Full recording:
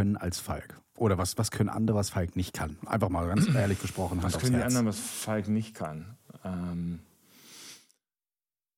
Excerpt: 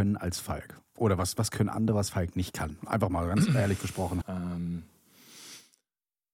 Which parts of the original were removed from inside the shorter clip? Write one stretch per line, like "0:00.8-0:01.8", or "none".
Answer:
0:04.2-0:06.4